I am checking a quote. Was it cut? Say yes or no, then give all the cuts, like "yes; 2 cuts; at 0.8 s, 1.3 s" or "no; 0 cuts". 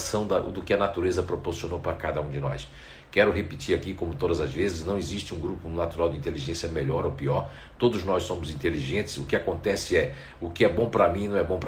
no; 0 cuts